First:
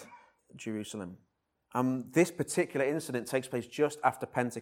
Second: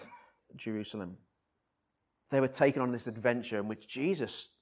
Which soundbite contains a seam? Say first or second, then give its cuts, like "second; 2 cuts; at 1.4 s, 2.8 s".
first; 1 cut; at 1.6 s